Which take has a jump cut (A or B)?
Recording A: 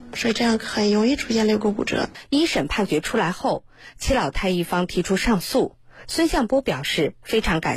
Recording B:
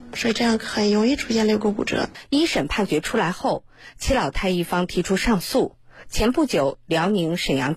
A